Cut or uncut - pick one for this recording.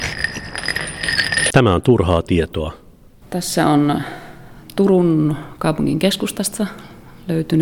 cut